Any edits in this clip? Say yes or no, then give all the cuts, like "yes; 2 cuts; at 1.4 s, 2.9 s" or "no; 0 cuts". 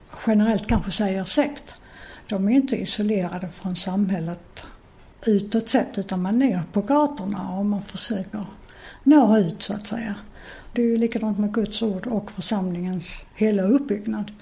yes; 1 cut; at 10.7 s